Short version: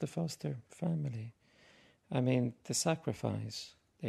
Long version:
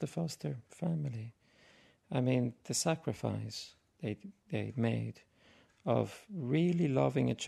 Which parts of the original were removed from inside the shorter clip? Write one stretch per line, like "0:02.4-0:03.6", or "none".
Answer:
none